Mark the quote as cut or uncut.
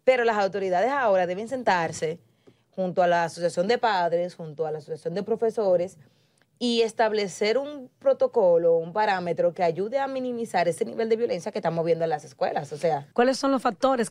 cut